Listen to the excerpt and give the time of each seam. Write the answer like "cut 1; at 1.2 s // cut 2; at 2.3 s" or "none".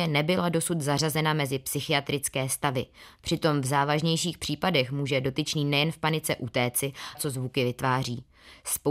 cut 1; at 7.1 s